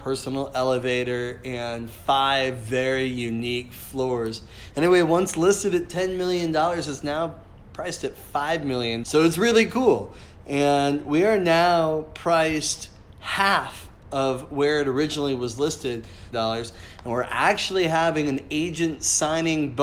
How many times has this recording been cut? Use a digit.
2